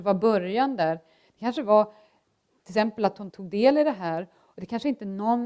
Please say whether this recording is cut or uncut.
cut